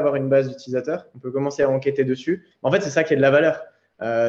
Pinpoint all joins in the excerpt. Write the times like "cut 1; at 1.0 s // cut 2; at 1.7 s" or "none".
cut 1; at 2.5 s